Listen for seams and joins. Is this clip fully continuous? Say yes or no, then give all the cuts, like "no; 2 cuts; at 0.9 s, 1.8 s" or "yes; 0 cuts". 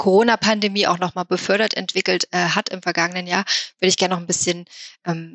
yes; 0 cuts